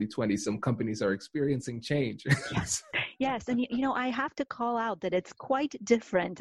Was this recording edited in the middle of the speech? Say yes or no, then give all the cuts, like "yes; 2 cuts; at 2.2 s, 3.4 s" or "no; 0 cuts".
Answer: no; 0 cuts